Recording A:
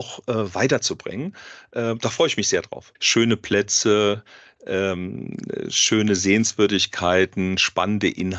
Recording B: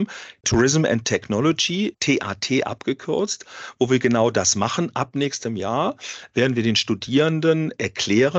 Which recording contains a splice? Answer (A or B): A